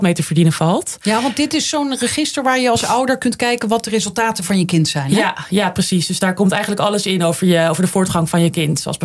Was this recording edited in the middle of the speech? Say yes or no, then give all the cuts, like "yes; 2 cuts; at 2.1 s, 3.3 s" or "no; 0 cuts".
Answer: no; 0 cuts